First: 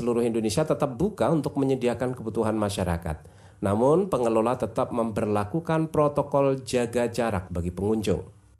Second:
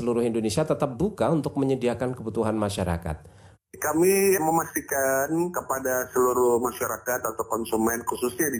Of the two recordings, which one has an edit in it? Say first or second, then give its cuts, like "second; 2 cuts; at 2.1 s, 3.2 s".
second; 1 cut; at 3.5 s